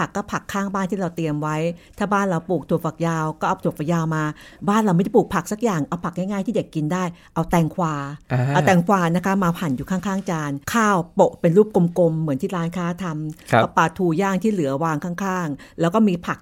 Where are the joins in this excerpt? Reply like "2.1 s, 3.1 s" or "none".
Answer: 10.6 s